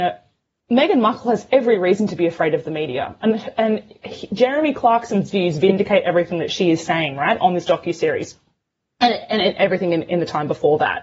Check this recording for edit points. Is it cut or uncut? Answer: uncut